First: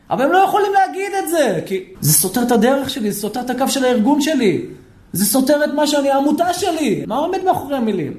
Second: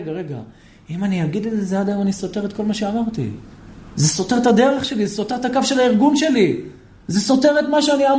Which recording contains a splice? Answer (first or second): first